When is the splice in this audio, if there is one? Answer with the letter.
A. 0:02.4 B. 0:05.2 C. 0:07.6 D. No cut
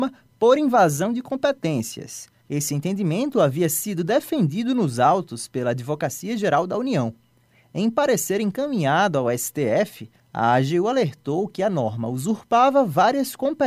A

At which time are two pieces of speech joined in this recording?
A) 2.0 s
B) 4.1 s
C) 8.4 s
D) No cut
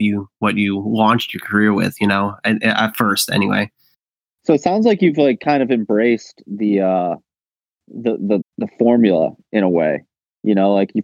C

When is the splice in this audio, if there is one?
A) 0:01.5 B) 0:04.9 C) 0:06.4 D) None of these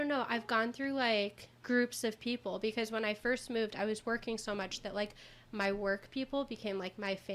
A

